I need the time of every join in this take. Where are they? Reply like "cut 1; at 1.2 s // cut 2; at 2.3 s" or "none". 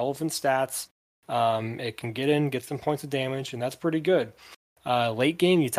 none